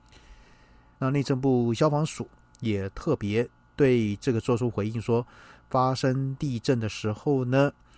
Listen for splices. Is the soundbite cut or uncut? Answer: cut